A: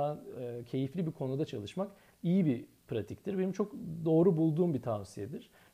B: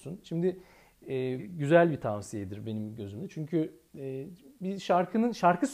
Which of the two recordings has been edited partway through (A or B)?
B